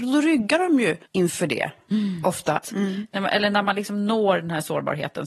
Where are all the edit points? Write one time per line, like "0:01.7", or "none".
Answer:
0:01.1
0:02.6